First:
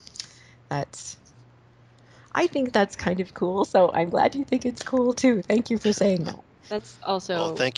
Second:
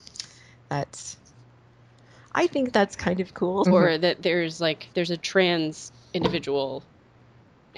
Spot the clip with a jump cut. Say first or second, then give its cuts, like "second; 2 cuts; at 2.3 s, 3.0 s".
second; 2 cuts; at 3.7 s, 4.9 s